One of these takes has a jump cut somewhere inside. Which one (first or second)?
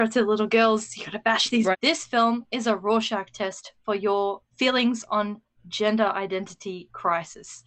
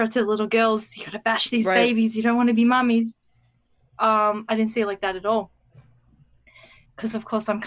first